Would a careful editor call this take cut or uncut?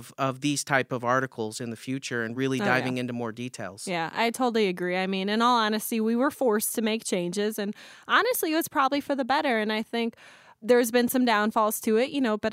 uncut